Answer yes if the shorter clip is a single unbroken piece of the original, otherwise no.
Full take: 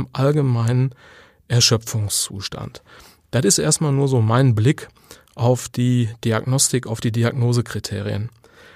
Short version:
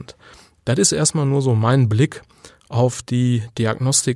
yes